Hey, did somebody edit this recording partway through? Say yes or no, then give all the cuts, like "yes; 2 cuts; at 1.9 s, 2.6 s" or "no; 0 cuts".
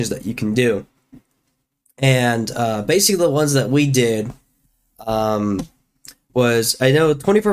no; 0 cuts